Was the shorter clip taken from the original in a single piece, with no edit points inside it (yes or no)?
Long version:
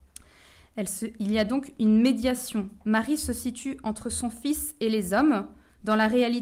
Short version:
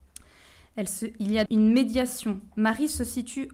no